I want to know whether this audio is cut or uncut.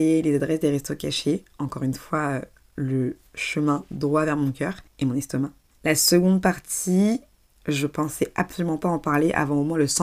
cut